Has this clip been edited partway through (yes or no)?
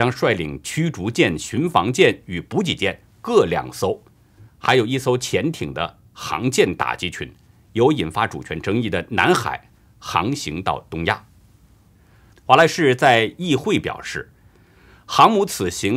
yes